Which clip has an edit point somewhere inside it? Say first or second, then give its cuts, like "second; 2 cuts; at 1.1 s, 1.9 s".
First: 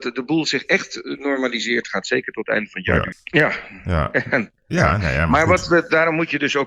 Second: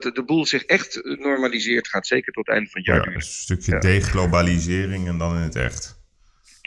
first; 1 cut; at 3.1 s